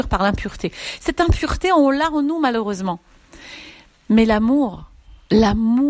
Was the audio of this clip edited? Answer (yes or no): no